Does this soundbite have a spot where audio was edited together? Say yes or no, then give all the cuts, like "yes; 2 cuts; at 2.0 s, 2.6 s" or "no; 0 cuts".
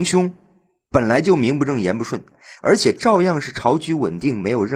yes; 1 cut; at 2.6 s